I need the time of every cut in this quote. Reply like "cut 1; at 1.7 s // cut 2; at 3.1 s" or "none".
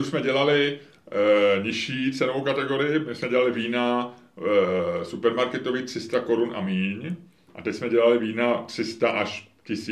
none